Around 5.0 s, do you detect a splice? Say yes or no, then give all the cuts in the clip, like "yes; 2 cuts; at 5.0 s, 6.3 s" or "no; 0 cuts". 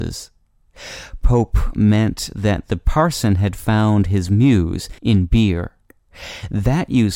yes; 1 cut; at 5.0 s